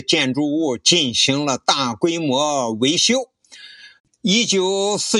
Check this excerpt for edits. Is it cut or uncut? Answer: cut